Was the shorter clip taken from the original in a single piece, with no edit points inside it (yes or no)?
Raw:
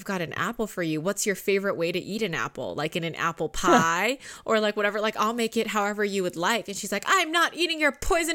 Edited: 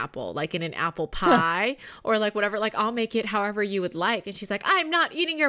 yes